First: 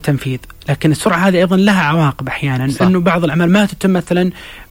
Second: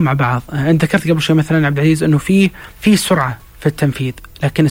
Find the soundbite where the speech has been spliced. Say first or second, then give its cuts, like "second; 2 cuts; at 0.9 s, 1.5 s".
second; 1 cut; at 2.7 s